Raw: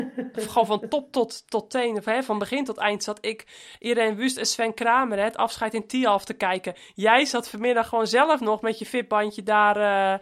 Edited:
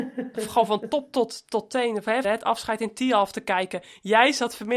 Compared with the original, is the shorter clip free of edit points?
no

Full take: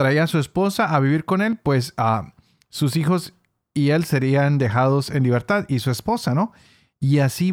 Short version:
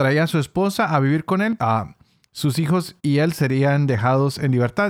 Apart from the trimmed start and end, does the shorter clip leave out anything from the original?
yes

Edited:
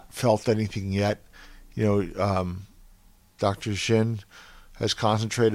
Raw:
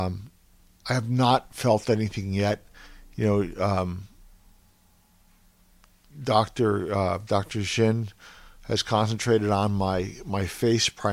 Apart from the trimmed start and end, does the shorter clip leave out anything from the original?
yes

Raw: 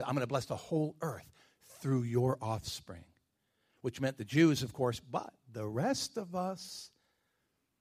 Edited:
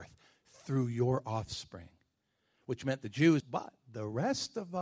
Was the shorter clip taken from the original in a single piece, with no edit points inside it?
no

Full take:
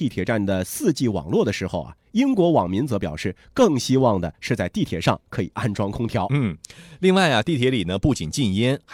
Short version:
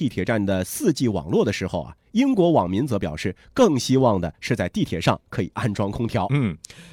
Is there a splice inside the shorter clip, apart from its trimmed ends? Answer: no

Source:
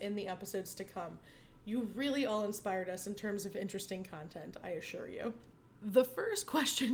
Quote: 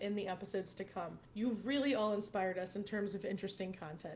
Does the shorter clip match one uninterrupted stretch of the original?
no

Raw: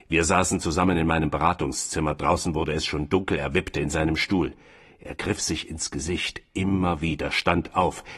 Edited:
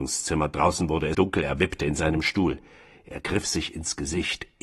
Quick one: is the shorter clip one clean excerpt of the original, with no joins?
no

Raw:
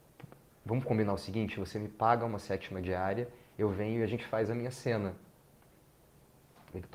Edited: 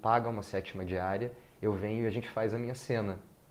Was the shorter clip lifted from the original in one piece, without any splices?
yes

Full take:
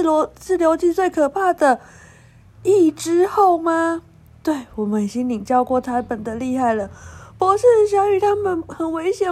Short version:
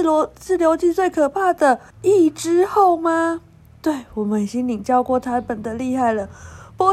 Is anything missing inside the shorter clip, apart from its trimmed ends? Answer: yes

